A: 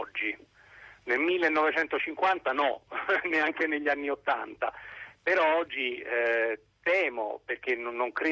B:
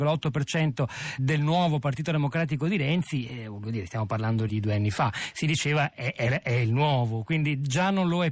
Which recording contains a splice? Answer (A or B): B